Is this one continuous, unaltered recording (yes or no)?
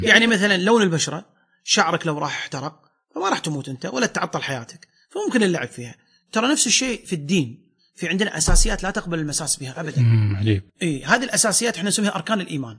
no